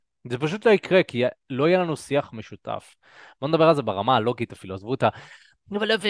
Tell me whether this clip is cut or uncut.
uncut